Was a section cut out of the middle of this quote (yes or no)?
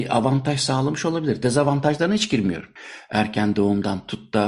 no